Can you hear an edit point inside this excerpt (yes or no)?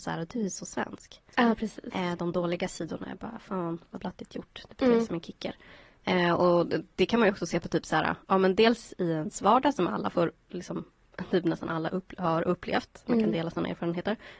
no